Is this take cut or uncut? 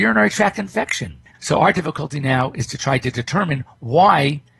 cut